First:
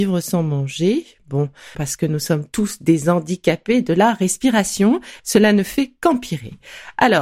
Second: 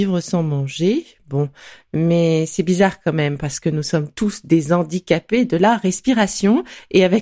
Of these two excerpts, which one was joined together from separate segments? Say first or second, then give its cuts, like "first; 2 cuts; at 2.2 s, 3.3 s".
first; 2 cuts; at 1.7 s, 5.2 s